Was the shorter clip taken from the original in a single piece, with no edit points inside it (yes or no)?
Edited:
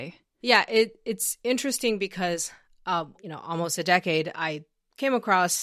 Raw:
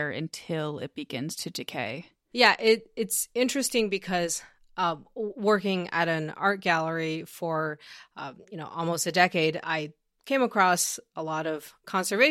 no